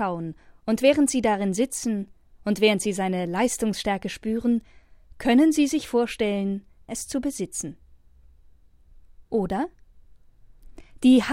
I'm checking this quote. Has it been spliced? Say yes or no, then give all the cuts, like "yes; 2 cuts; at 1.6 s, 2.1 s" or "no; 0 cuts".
yes; 1 cut; at 6.9 s